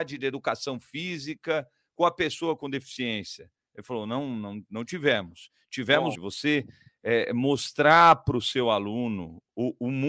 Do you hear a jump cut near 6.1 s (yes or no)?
yes